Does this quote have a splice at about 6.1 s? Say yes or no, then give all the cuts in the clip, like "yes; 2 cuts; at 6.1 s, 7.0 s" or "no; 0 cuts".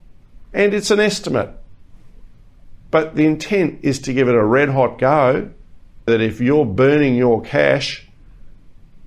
yes; 2 cuts; at 2.9 s, 6.1 s